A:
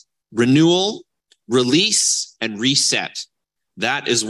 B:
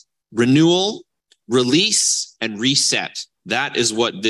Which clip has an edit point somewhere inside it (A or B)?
B